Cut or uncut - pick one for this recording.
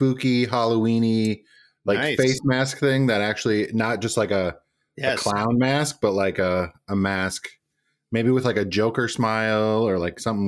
uncut